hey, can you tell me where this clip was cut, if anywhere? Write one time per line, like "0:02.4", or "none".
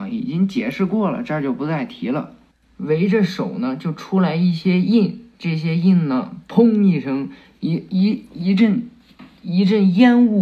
none